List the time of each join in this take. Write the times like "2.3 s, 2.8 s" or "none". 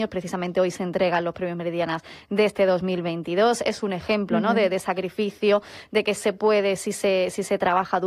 none